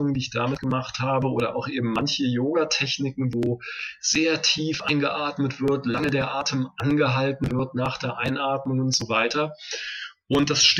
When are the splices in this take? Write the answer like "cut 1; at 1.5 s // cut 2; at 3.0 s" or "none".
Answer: none